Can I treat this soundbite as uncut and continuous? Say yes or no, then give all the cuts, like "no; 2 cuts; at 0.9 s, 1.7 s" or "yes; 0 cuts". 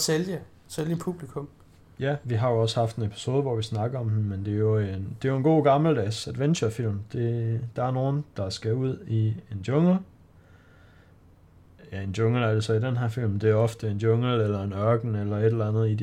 no; 1 cut; at 2.2 s